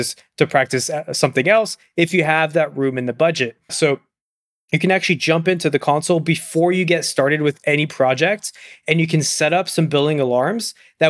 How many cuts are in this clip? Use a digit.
1